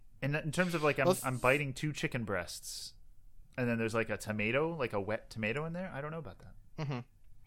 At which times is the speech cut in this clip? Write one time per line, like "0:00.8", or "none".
none